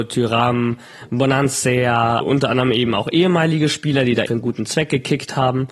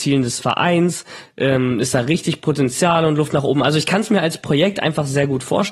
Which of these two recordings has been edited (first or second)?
first